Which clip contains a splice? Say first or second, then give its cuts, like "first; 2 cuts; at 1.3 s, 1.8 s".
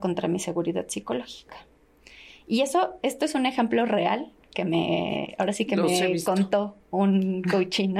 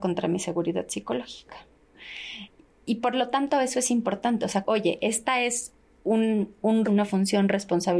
second; 3 cuts; at 1.9 s, 4.6 s, 6.8 s